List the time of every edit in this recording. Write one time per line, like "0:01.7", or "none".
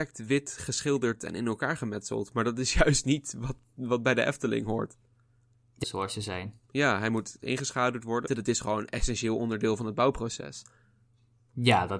0:05.8
0:08.3